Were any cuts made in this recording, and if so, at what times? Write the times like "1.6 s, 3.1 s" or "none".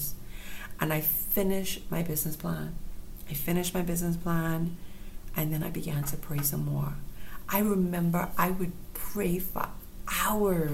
none